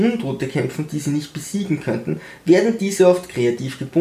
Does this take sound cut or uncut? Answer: uncut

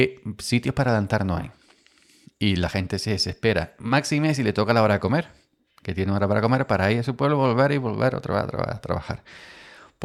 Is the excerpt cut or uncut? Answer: uncut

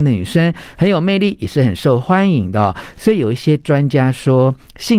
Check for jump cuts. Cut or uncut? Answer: uncut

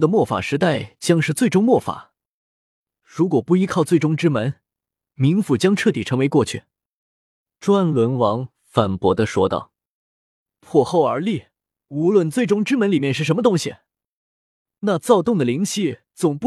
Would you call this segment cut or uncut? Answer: uncut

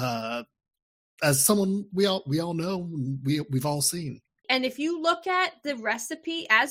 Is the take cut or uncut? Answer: cut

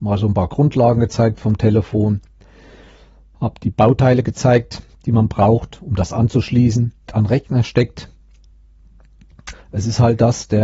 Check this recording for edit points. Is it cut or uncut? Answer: cut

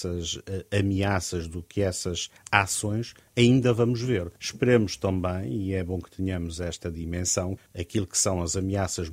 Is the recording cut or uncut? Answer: cut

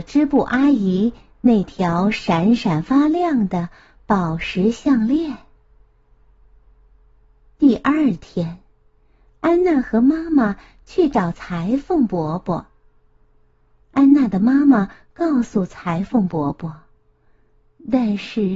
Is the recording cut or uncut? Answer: cut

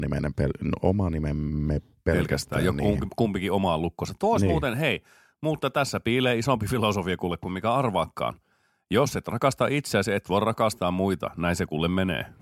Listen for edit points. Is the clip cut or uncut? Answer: uncut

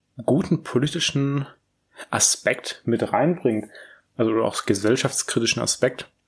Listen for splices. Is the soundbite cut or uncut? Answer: uncut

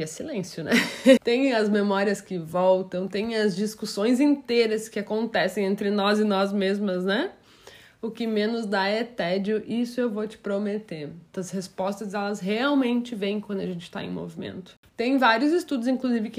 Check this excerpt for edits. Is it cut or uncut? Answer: cut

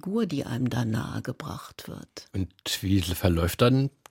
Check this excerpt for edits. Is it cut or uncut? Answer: uncut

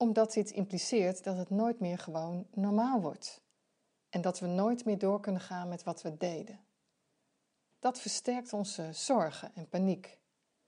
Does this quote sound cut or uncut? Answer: uncut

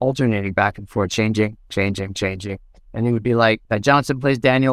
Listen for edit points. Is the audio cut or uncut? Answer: cut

